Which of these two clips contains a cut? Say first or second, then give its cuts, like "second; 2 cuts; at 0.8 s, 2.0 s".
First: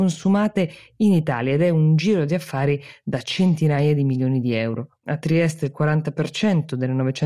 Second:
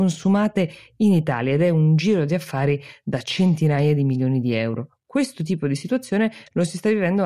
first; 1 cut; at 5.0 s